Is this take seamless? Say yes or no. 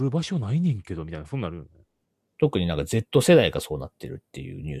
yes